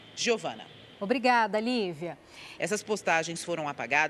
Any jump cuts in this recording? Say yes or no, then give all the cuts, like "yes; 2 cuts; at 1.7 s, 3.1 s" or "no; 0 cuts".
yes; 1 cut; at 2.6 s